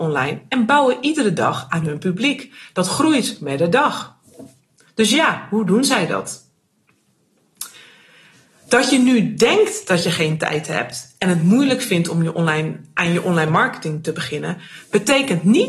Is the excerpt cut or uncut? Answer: uncut